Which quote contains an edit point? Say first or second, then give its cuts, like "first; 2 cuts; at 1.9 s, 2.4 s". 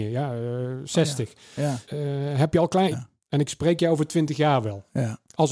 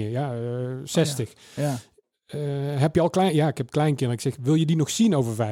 first; 2 cuts; at 1.8 s, 2.9 s